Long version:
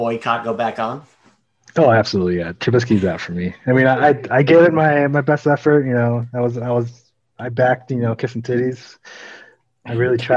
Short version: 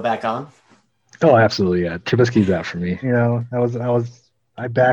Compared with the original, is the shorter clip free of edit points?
no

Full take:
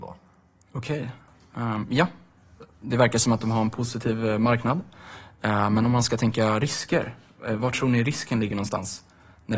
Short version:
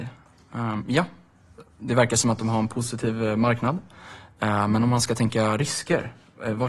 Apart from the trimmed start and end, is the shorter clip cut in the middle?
no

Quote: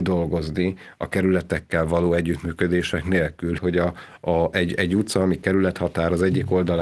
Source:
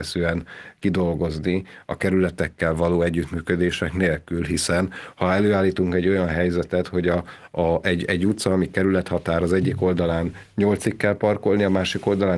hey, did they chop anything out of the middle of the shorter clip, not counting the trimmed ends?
yes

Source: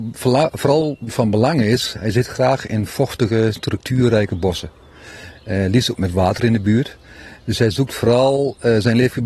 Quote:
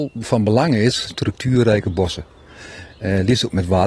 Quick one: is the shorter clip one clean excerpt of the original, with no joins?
no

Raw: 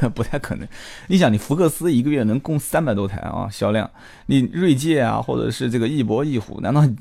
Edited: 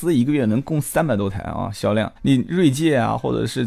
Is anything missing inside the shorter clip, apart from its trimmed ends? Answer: yes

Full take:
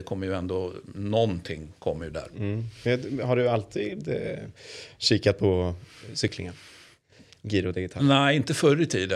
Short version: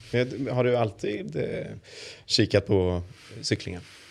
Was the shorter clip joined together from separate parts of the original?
no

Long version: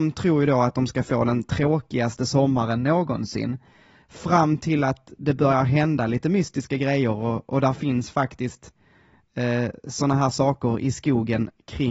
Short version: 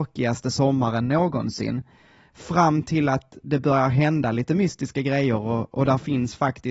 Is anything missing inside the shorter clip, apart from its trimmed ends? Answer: no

